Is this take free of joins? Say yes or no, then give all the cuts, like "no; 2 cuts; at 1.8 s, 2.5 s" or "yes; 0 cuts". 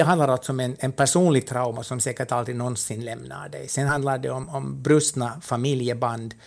yes; 0 cuts